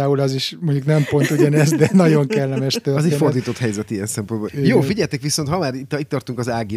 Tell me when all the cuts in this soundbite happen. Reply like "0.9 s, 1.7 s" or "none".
4.5 s